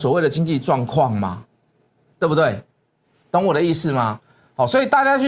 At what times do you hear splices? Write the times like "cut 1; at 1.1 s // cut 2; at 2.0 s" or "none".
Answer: none